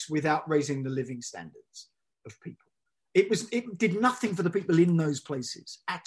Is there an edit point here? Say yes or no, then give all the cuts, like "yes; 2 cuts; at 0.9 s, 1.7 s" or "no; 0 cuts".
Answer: no; 0 cuts